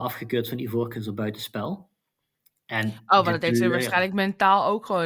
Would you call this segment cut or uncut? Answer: uncut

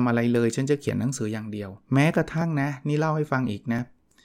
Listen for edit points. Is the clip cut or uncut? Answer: cut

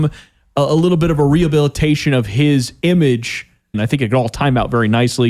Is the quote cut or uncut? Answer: cut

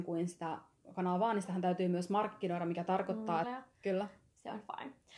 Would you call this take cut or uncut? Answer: cut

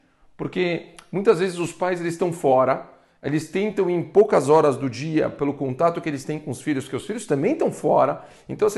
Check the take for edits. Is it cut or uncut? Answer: uncut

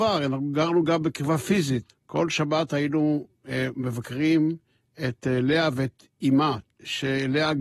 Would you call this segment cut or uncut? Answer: cut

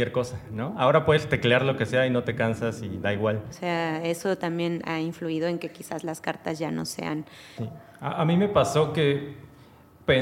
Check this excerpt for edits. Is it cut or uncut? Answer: cut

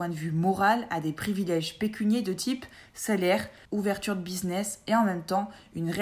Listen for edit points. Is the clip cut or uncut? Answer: cut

